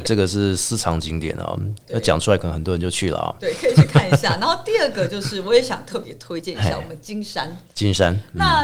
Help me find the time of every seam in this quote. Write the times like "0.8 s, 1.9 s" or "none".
none